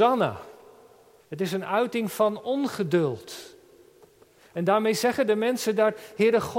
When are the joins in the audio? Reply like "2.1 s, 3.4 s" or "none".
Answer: 1.2 s